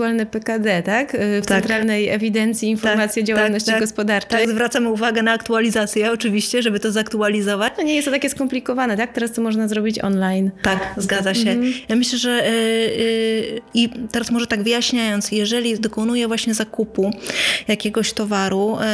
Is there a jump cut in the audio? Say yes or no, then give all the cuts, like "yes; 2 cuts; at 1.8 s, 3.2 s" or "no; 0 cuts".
no; 0 cuts